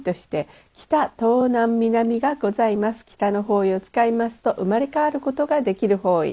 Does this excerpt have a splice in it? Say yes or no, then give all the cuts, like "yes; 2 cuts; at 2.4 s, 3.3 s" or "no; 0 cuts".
no; 0 cuts